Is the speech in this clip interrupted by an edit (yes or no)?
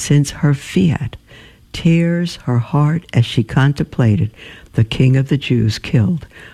no